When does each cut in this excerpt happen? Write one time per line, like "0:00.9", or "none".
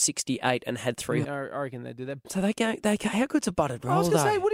0:01.2
0:02.2